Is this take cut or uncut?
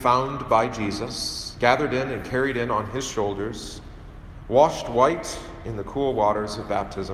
uncut